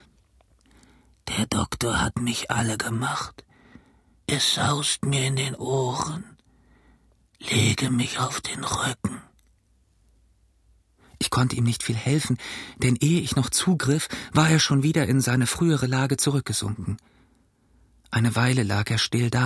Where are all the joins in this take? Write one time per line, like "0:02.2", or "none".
none

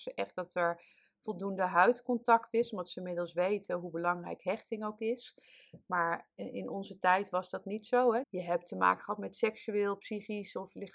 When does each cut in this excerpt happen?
0:08.2

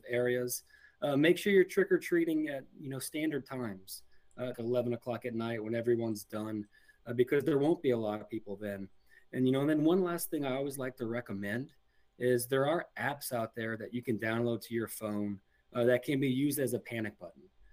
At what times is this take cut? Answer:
0:04.5

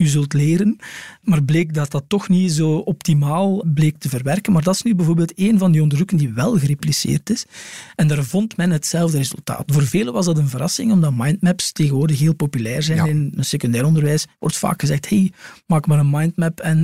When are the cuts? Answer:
0:09.7
0:13.4

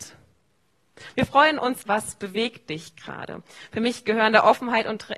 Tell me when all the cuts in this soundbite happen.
0:01.9

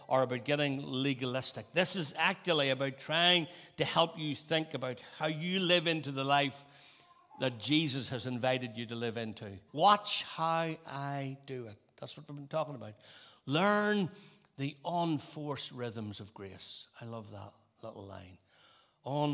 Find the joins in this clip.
0:09.7

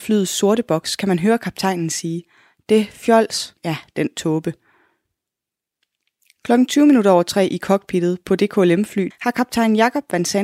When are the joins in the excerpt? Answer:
0:03.6
0:09.1

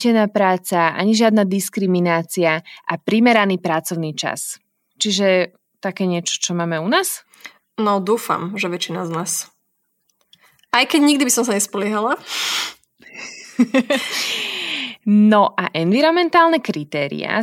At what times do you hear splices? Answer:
none

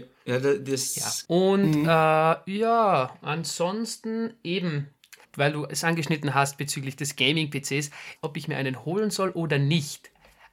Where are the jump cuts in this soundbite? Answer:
0:01.2
0:05.2
0:08.2

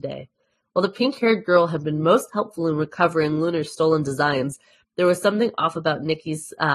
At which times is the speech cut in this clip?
none

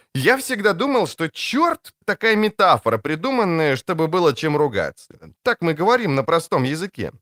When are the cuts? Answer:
0:02.0
0:05.3

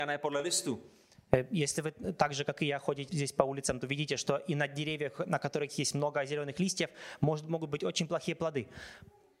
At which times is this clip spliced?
0:03.1

